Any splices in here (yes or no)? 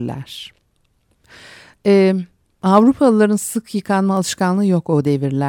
no